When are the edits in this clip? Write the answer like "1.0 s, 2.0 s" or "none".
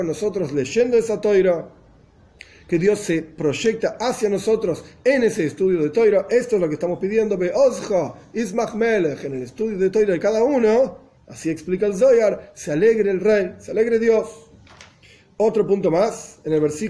none